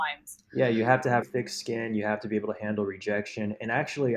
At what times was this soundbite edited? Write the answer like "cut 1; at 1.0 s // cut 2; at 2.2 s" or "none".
cut 1; at 1.2 s